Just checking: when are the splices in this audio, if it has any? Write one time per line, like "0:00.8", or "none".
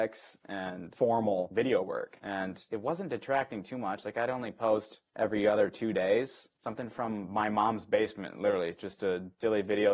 none